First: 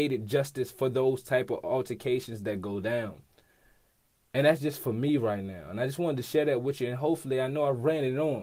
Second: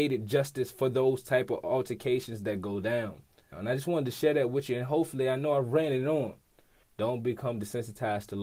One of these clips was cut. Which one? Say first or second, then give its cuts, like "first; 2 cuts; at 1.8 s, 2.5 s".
second; 2 cuts; at 3.5 s, 6.8 s